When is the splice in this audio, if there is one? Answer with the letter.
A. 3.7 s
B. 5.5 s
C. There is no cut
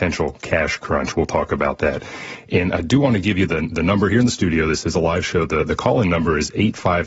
C